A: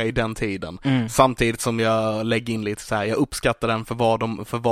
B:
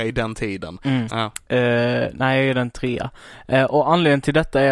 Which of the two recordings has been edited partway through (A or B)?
B